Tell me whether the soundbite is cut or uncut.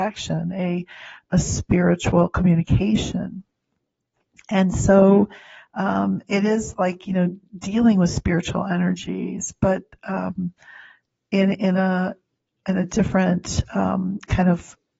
uncut